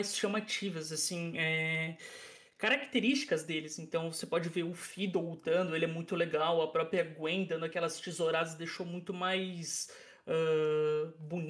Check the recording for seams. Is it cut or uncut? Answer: uncut